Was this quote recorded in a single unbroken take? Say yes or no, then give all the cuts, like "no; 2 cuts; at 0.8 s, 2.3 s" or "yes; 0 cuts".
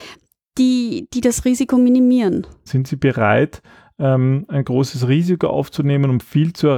no; 1 cut; at 2.7 s